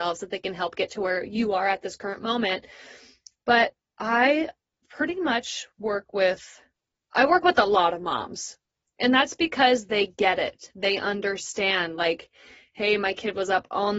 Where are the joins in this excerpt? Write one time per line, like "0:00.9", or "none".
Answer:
none